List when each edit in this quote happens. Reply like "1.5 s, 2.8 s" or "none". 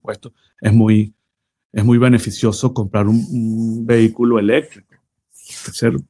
none